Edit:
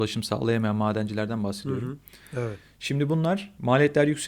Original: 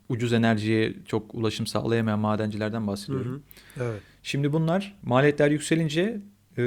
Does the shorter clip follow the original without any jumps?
yes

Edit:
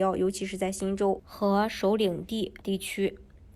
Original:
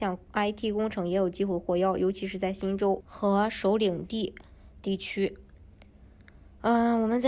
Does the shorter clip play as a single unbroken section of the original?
no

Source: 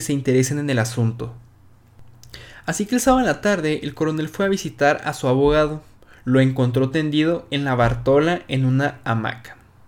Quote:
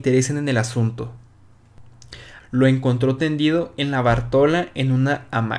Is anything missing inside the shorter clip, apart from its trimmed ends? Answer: yes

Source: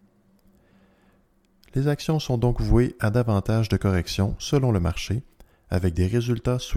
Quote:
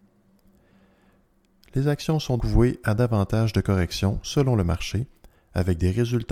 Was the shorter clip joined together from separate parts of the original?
yes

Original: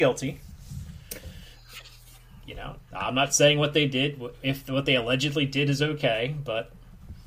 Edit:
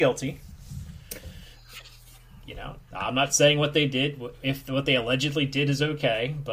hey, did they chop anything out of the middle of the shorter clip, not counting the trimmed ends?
no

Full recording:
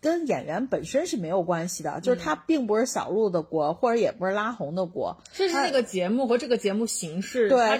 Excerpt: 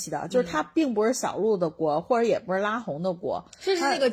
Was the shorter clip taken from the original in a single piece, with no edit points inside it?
yes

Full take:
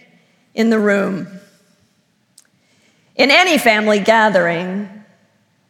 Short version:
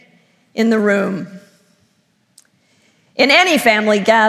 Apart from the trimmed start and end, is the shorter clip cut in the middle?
no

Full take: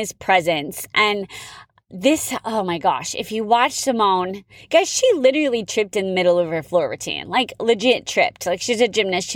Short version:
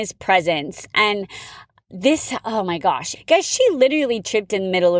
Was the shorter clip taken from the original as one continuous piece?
no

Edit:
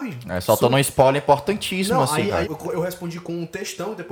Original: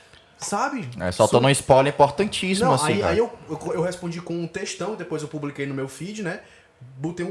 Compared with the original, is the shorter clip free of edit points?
no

